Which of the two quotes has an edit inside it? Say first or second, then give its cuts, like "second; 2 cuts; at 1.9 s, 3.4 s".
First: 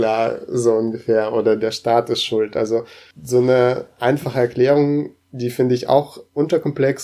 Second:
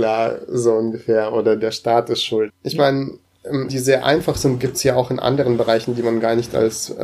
second; 2 cuts; at 2.5 s, 3.7 s